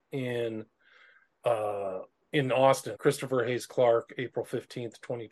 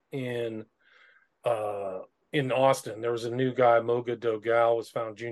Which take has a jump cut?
first; 1 cut; at 2.9 s

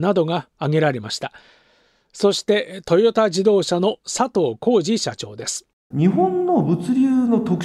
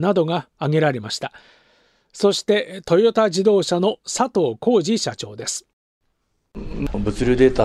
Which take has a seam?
first; 1 cut; at 5.9 s

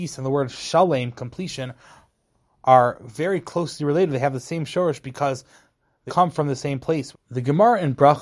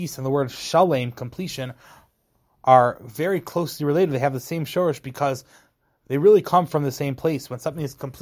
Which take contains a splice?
first; 2 cuts; at 6.1 s, 7.1 s

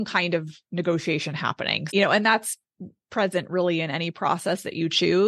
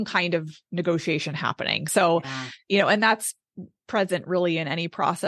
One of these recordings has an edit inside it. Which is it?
first; 1 cut; at 1.9 s

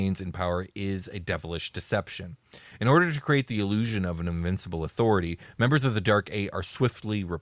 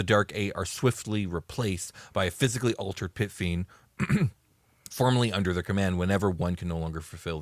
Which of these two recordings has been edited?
second; 1 cut; at 4.9 s

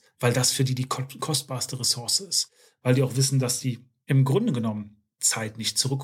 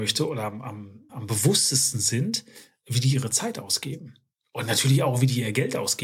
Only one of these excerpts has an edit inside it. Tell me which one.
second; 1 cut; at 1.1 s

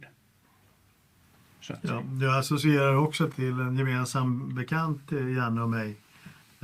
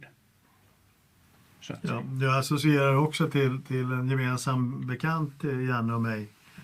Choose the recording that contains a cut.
first; 1 cut; at 3.3 s

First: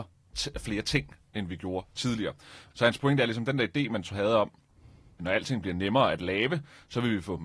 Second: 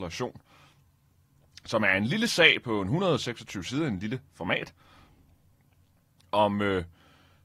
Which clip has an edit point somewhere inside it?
first; 2 cuts; at 2.7 s, 5.2 s

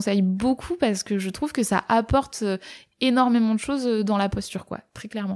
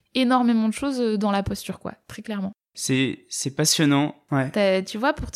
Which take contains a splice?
second; 1 cut; at 4.3 s

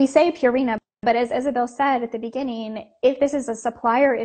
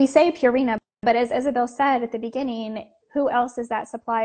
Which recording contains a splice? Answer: second; 1 cut; at 3.0 s

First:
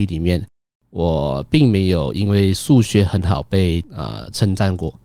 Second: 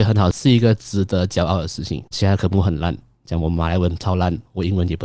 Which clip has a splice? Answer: second; 1 cut; at 2.1 s

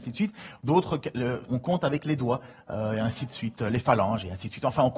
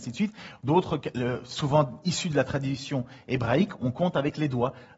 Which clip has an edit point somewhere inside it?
first; 1 cut; at 1.5 s

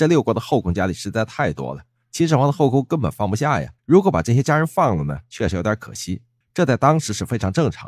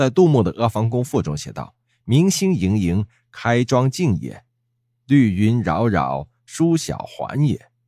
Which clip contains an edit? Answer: first; 2 cuts; at 3.8 s, 6.4 s

